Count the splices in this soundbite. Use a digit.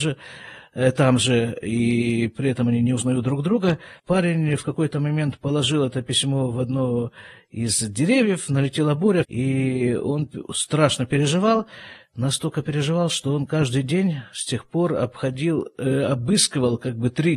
2